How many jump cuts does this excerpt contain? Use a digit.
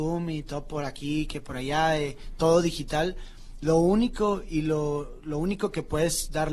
0